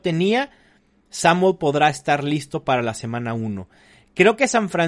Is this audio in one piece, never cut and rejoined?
yes; 0 cuts

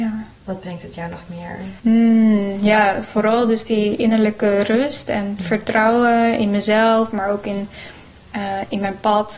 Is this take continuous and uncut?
no; 1 cut; at 1.8 s

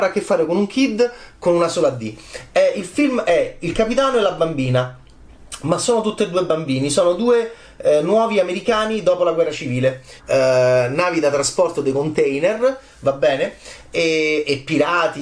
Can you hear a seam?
yes; 1 cut; at 10.2 s

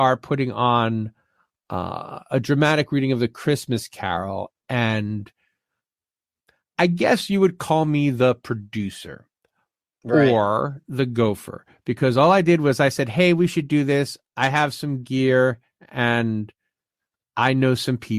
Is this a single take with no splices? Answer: yes; 0 cuts

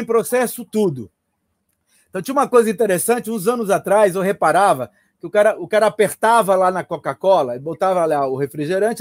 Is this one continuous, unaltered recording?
yes; 0 cuts

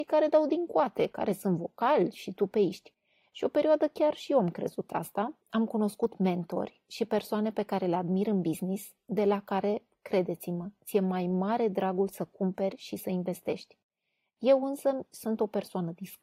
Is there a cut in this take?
yes; 1 cut; at 5.4 s

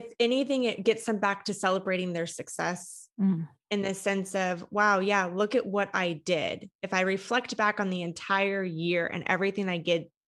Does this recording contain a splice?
no; 0 cuts

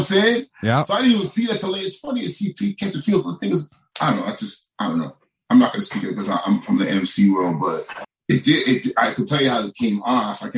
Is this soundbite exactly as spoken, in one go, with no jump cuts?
yes; 0 cuts

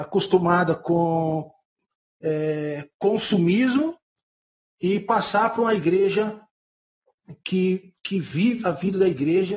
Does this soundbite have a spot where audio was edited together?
yes; 1 cut; at 8.6 s

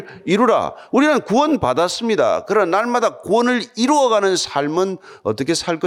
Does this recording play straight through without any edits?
yes; 0 cuts

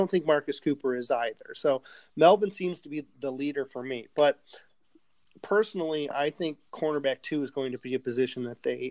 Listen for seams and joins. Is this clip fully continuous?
yes; 0 cuts

